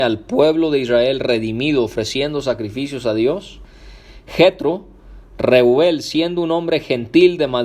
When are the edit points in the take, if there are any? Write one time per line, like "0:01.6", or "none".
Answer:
none